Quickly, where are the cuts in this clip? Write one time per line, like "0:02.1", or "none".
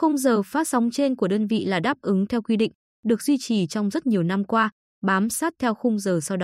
none